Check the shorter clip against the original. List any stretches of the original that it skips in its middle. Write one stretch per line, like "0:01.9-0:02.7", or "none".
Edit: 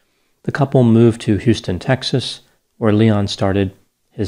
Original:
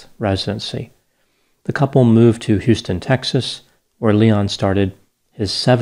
none